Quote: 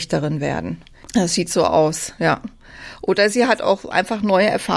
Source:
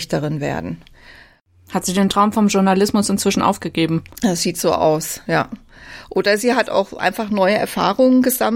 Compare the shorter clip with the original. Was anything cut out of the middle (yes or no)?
yes